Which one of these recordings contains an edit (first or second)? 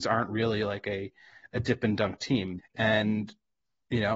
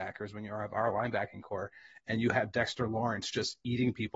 first